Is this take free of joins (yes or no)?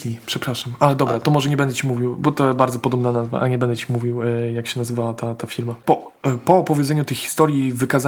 yes